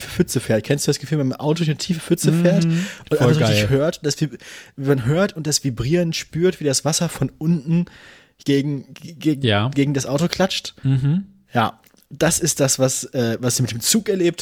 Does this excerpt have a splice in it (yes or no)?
no